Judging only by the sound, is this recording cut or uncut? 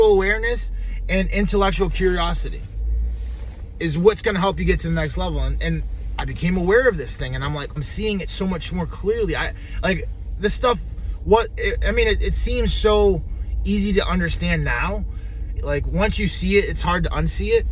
cut